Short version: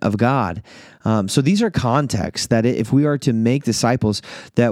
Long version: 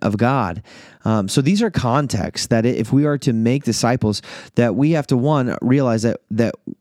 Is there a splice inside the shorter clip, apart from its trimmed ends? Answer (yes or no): no